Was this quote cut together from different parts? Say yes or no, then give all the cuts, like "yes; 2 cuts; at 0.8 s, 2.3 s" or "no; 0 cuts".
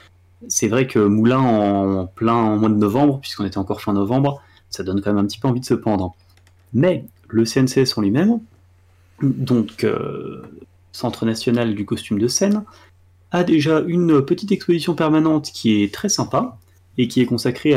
no; 0 cuts